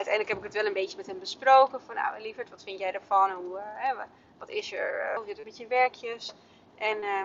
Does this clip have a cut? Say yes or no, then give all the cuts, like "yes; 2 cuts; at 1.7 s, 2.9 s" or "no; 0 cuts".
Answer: yes; 1 cut; at 5.2 s